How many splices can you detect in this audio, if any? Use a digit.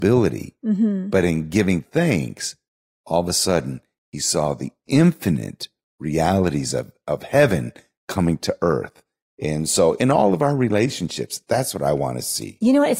0